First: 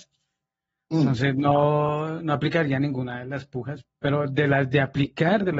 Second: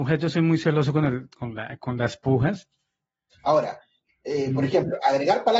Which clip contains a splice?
second; 1 cut; at 3.3 s

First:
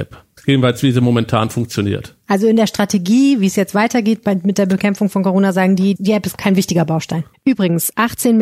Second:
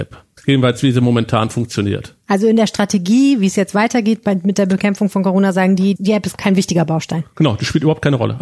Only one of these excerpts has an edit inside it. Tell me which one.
first; 1 cut; at 7.3 s

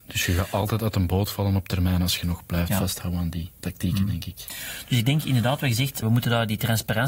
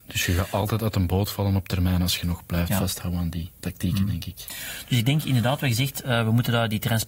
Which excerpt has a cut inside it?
first; 1 cut; at 6.0 s

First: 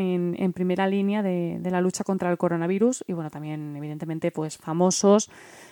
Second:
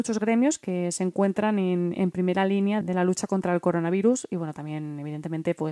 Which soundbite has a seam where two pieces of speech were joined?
second; 1 cut; at 2.8 s

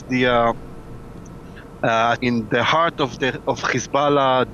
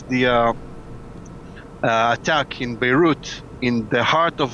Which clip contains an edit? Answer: first; 1 cut; at 2.2 s

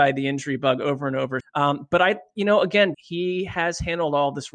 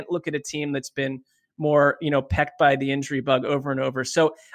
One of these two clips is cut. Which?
first; 2 cuts; at 1.4 s, 2.9 s

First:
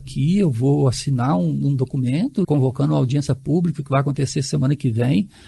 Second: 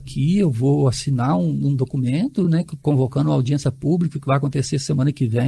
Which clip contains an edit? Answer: first; 1 cut; at 2.4 s

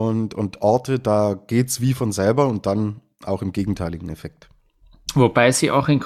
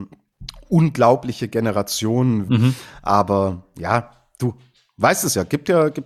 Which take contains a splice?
second; 1 cut; at 2.5 s

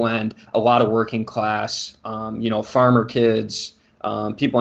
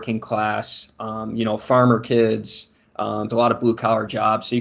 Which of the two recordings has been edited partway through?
second; 1 cut; at 3.3 s

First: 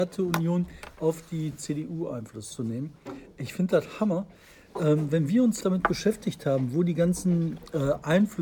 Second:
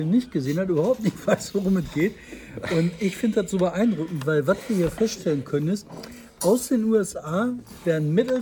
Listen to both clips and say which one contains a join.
first; 1 cut; at 5.6 s

